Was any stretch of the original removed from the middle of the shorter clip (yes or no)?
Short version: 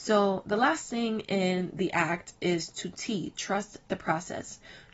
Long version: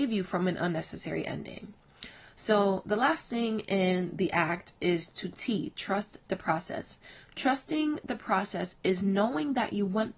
no